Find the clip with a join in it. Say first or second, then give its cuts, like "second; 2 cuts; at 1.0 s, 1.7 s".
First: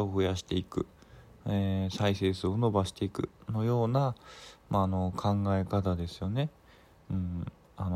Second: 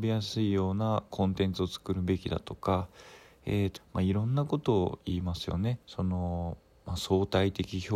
second; 2 cuts; at 3.8 s, 5.8 s